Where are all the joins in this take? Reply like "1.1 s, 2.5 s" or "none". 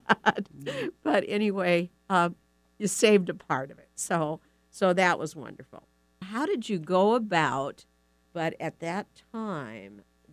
6.2 s, 8.2 s